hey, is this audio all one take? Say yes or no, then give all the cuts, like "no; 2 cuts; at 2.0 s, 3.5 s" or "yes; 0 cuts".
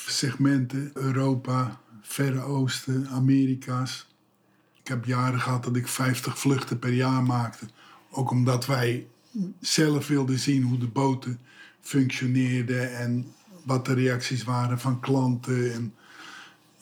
no; 2 cuts; at 1.0 s, 4.8 s